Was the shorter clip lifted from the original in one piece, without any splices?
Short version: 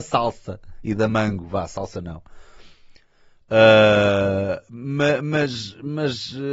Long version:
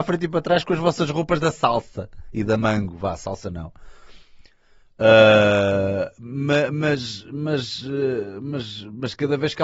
yes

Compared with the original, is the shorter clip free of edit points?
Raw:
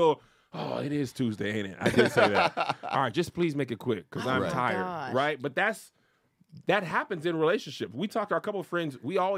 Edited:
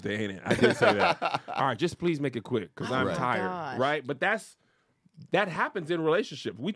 yes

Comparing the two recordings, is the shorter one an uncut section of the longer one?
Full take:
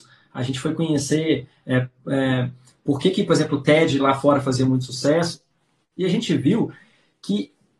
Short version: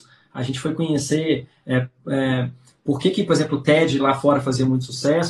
yes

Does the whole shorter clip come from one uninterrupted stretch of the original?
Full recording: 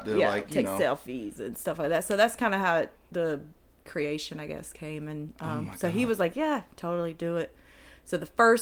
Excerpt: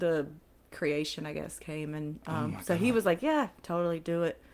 yes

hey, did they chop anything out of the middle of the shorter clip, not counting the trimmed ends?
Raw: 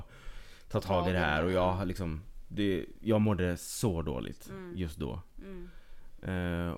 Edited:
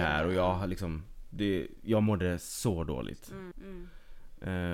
yes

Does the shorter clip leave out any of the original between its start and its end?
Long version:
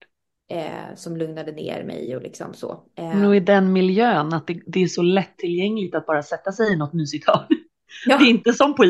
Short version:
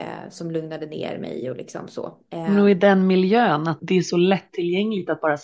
yes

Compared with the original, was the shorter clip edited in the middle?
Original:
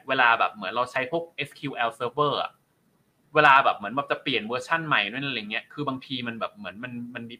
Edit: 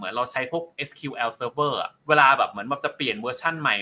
yes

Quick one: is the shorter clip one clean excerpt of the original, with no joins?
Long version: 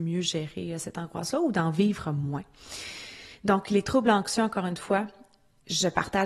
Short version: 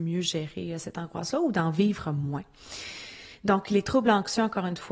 yes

